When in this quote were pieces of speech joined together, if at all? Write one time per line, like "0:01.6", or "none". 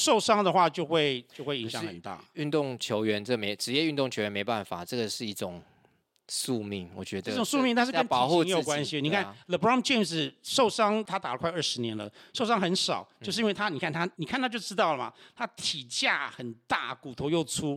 0:14.1